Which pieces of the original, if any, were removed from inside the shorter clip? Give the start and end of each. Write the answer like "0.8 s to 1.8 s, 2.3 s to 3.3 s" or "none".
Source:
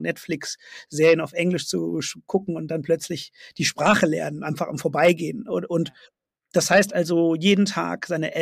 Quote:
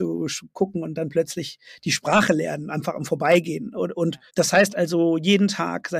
6.0 s to 6.4 s